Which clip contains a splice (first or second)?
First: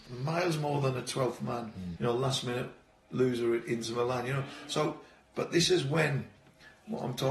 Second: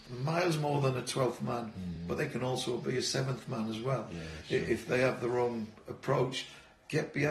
first